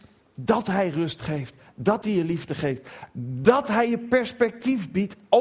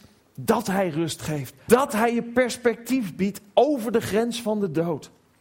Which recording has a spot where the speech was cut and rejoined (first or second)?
second